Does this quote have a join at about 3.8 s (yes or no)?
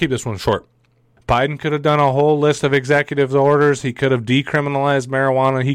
no